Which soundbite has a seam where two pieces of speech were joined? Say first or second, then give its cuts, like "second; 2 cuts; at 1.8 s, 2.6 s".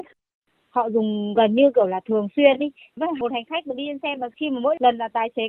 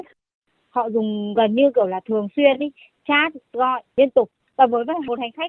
first; 1 cut; at 3.0 s